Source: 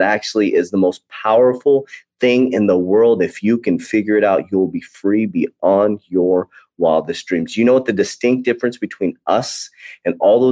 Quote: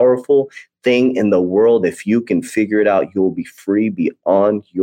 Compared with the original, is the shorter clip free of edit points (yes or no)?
yes